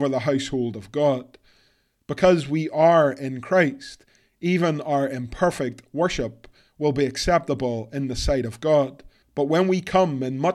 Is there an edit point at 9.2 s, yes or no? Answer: yes